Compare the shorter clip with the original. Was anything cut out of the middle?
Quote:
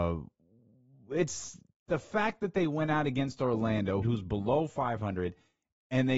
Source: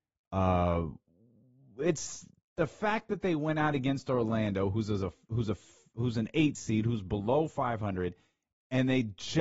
yes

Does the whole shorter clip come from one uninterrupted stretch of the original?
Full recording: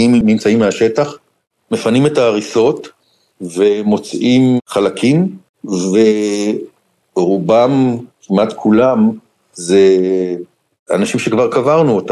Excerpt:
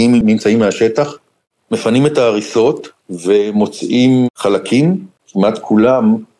no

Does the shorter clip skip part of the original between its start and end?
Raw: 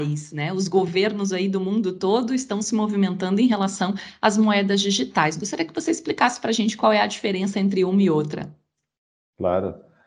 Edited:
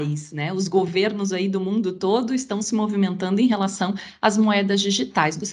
no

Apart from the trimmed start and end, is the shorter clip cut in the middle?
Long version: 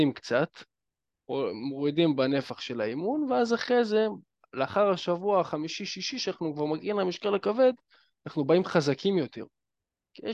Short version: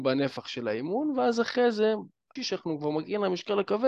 yes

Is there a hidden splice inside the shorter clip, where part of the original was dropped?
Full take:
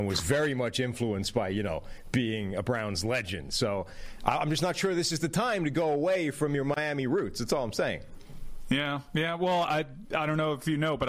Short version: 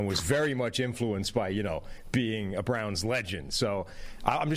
no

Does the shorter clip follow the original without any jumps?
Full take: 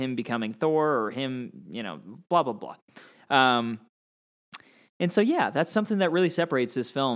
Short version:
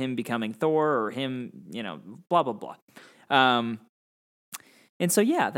yes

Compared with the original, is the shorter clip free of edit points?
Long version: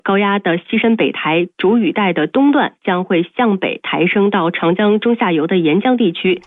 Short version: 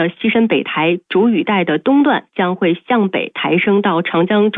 yes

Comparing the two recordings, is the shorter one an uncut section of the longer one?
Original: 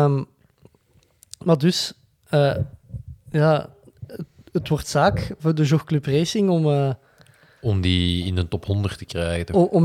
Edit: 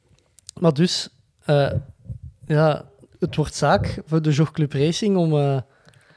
no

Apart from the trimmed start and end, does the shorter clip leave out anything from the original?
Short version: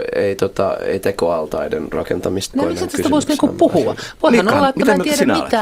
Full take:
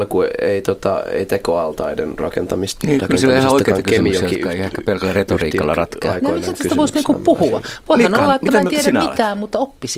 yes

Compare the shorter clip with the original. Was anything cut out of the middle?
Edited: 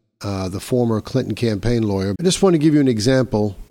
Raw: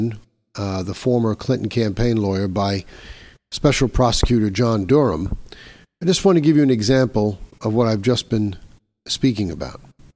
yes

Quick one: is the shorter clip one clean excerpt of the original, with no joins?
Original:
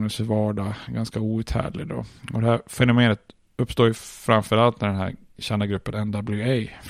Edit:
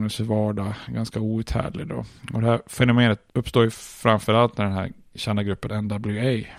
no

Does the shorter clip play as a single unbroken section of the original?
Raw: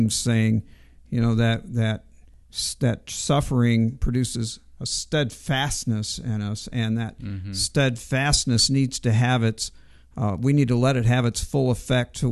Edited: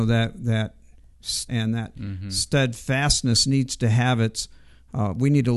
no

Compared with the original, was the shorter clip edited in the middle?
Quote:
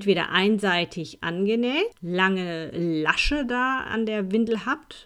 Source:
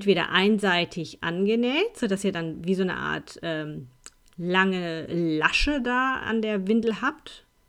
yes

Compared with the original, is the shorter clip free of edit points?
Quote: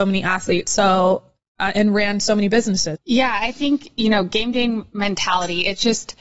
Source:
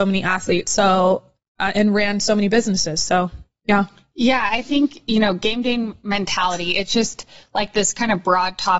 no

